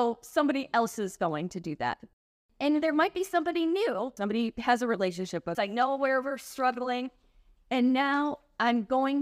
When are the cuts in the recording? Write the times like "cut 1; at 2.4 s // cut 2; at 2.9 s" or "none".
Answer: cut 1; at 4.2 s // cut 2; at 5.5 s